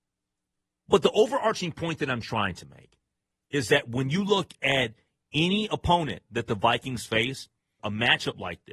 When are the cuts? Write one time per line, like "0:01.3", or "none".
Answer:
0:07.8